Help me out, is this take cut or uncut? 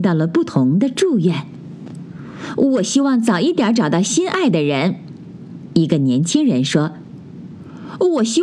uncut